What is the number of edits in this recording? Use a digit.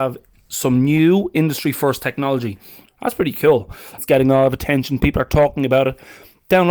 2